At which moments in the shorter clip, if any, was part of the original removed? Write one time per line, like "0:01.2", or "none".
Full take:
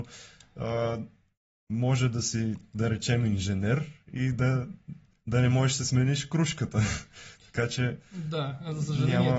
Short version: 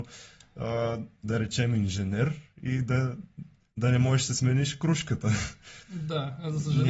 0:01.2
0:05.8